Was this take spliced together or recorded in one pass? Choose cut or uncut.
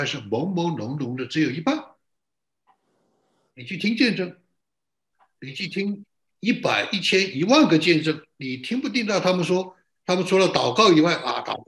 uncut